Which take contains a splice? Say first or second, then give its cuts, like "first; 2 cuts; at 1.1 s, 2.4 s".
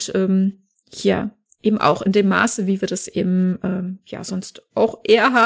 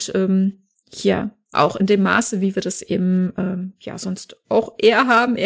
second; 1 cut; at 1.5 s